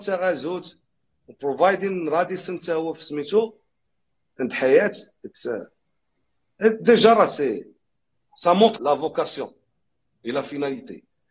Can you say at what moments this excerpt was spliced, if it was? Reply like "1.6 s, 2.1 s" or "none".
8.8 s